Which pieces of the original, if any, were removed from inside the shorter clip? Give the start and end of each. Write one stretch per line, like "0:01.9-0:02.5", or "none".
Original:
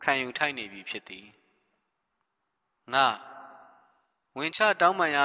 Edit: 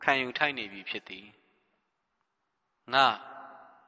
none